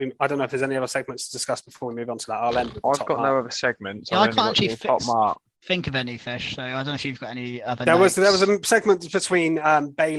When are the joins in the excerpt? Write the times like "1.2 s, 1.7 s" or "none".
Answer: none